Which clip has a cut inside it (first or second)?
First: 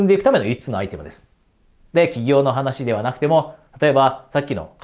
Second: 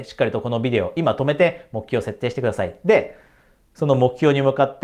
first